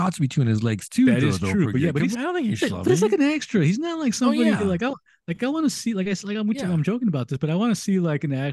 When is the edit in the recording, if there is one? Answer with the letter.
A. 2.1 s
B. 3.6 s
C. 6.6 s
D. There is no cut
A